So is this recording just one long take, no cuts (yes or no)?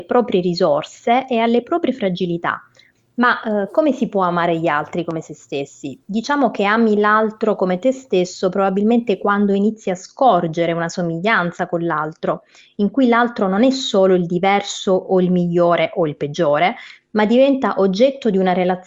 no